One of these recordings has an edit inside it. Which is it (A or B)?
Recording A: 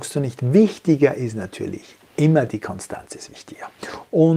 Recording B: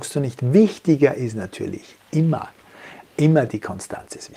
A